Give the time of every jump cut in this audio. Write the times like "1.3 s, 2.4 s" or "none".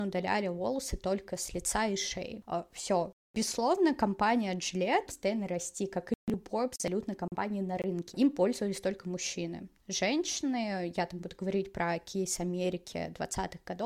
5.1 s, 8.1 s